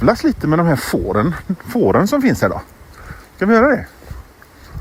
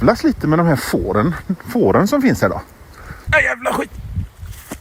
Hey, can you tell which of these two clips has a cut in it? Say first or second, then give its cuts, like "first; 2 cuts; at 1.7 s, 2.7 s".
second; 1 cut; at 3.3 s